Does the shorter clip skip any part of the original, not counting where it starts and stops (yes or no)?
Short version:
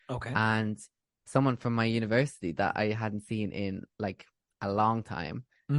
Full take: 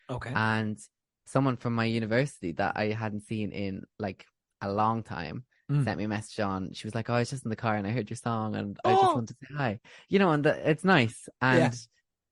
no